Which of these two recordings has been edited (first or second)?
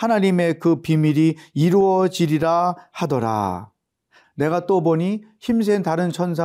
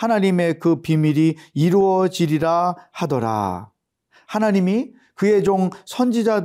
first